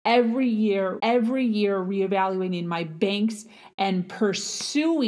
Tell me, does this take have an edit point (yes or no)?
yes